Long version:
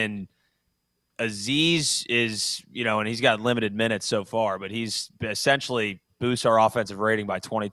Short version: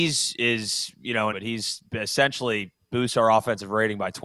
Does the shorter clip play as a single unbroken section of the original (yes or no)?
no